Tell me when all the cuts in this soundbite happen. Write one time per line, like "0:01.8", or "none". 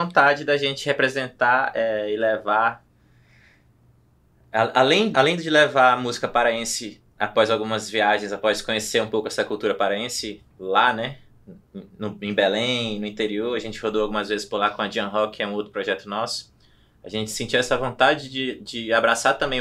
0:05.1